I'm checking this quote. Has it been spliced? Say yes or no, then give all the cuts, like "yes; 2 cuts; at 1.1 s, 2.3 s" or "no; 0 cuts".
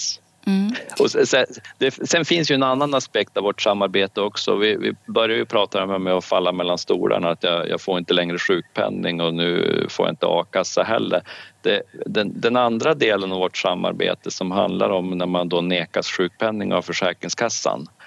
no; 0 cuts